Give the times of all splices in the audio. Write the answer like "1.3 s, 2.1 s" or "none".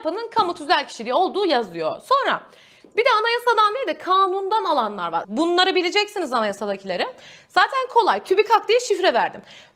5.2 s